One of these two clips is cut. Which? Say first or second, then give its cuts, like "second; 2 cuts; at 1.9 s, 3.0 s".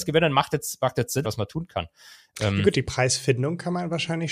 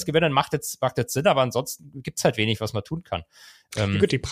first; 1 cut; at 1.2 s